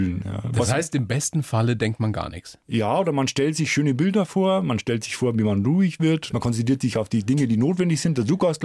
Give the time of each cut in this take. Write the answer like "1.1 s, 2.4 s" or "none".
2.6 s, 6.3 s